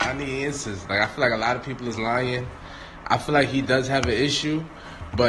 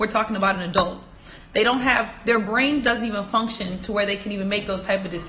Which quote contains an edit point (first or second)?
second